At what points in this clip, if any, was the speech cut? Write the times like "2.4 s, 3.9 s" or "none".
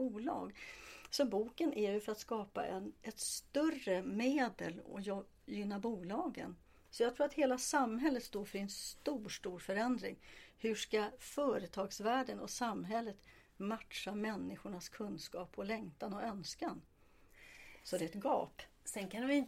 6.9 s